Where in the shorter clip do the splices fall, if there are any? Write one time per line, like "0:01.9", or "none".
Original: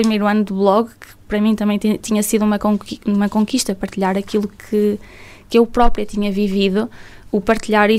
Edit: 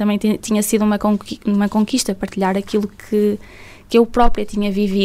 none